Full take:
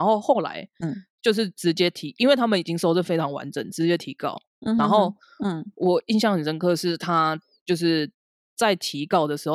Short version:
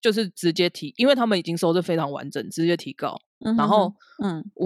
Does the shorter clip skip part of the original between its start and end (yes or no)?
no